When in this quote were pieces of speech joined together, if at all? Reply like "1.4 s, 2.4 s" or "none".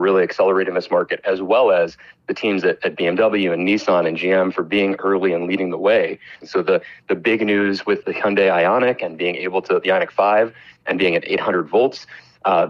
6.4 s, 8.0 s